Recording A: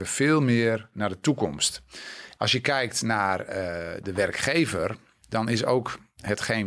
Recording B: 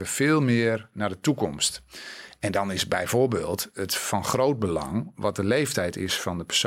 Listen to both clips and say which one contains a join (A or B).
A